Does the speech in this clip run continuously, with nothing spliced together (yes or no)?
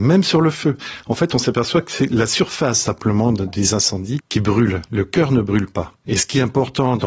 yes